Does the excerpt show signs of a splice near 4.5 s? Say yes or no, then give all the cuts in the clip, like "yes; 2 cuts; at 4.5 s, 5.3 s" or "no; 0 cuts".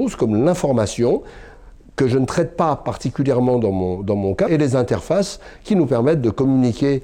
yes; 1 cut; at 4.5 s